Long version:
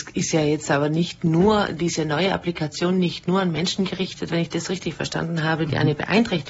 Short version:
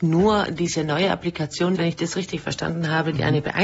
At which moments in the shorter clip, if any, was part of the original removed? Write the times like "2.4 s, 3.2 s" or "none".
1.7 s